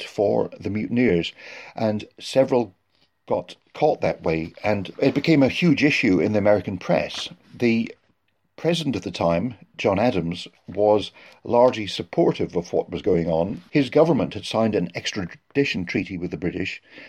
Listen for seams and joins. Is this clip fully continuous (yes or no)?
yes